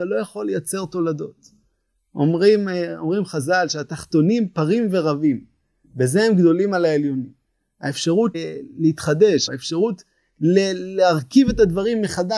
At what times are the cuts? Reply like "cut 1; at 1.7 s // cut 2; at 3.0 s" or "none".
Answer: cut 1; at 8.3 s // cut 2; at 9.5 s